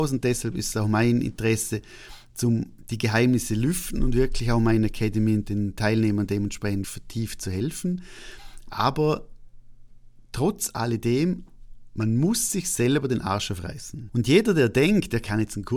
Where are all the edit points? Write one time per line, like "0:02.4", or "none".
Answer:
0:06.8
0:14.1